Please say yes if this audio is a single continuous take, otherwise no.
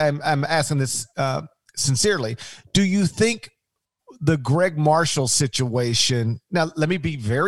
yes